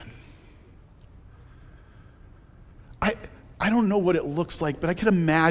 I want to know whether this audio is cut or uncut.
uncut